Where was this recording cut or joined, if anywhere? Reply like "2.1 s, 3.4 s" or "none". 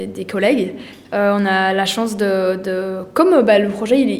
none